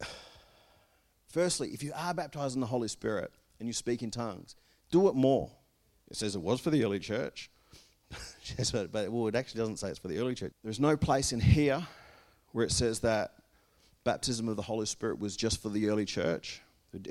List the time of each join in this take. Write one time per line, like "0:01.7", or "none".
0:06.0
0:10.5